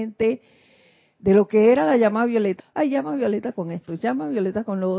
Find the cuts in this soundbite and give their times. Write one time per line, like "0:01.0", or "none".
0:02.6